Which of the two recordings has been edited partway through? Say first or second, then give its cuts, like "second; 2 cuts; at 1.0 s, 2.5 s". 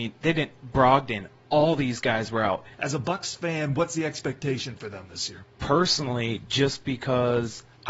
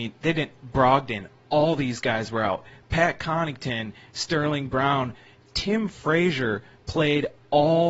first; 1 cut; at 2.7 s